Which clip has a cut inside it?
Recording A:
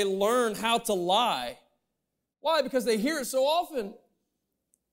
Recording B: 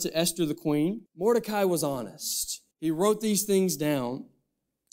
B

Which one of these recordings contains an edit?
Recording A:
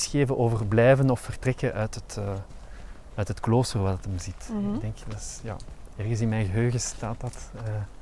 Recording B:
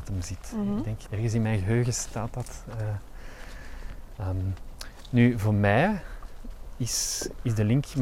B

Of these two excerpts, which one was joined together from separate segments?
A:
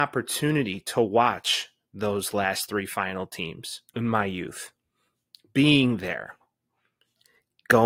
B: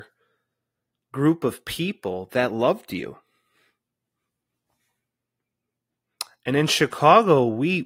A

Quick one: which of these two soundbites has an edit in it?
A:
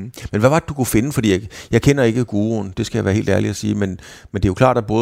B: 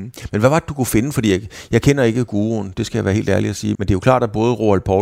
B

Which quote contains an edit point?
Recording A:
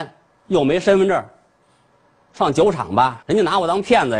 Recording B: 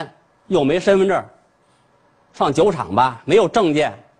A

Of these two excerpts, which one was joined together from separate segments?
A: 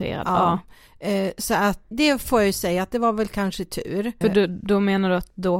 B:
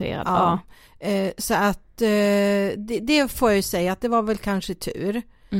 A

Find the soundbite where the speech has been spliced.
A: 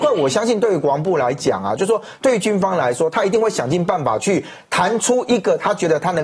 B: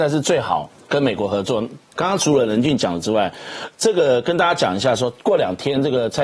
B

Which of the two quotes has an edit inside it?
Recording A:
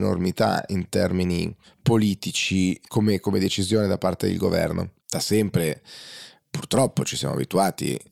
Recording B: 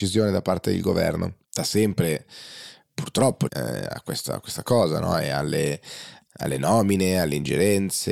B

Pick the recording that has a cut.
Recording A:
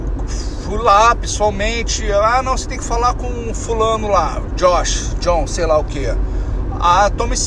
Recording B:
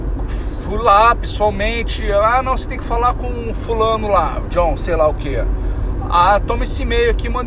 B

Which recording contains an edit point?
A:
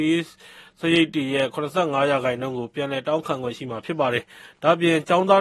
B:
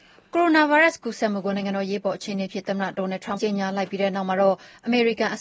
B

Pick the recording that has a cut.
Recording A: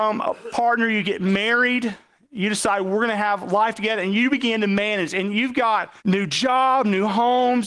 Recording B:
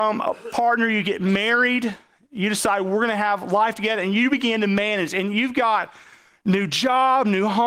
A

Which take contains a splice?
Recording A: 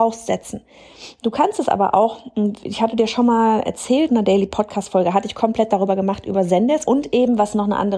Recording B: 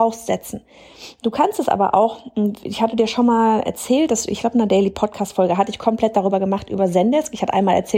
A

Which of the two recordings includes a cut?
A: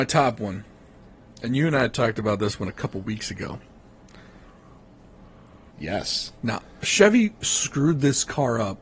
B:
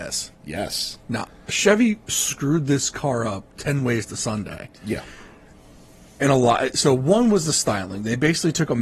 A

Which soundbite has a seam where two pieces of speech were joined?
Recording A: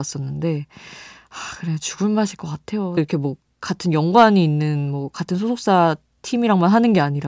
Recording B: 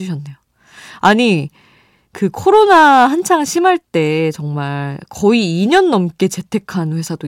A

